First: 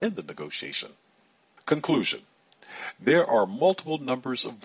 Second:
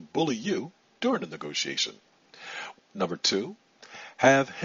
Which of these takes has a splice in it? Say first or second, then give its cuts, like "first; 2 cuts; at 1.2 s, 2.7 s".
second; 1 cut; at 2.7 s